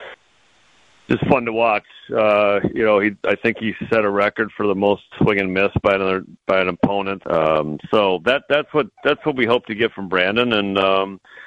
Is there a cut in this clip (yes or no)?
yes